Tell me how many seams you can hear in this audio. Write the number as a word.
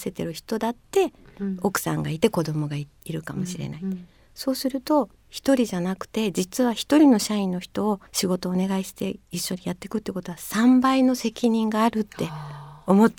one